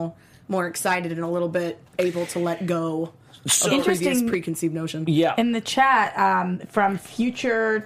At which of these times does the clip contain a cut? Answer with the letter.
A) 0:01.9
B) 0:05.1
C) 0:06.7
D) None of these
A